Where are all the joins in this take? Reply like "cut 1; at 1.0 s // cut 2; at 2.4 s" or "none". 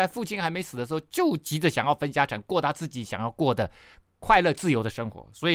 none